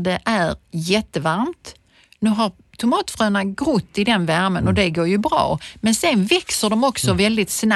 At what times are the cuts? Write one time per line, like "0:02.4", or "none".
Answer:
none